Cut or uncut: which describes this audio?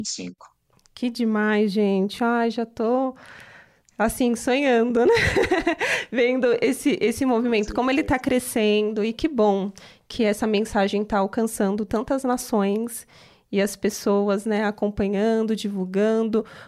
uncut